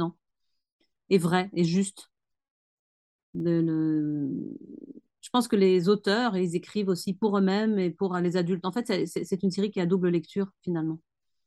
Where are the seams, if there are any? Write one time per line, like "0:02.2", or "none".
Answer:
none